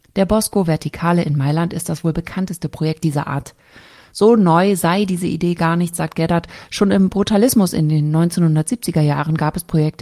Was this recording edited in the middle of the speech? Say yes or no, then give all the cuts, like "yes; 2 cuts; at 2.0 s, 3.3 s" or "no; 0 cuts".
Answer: no; 0 cuts